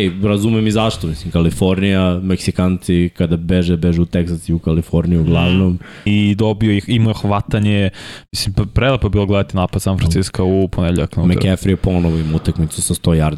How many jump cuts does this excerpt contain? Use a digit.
1